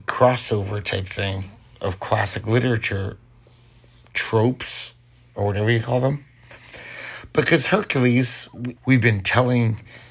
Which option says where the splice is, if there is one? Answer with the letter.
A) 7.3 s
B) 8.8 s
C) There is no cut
B